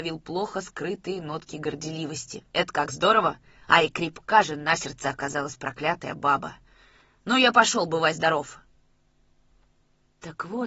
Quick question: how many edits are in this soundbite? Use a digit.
1